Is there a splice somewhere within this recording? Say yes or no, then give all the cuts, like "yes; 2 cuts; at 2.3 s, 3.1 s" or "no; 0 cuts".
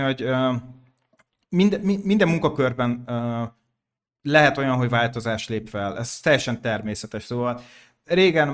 no; 0 cuts